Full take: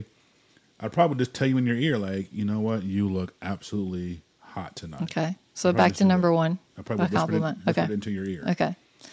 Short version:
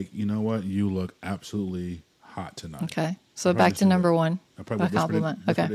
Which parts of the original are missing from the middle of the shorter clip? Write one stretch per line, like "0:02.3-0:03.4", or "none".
none